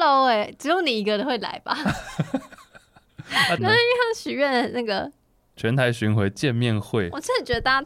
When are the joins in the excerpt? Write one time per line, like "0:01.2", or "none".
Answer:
0:03.6